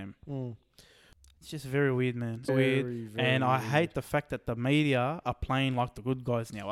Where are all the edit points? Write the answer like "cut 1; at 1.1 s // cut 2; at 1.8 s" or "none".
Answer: cut 1; at 2.5 s